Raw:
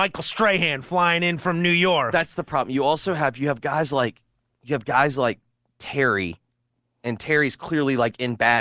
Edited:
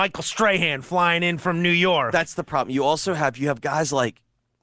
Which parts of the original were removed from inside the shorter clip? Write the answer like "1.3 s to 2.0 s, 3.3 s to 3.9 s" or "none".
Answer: none